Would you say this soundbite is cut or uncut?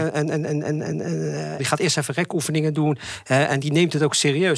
cut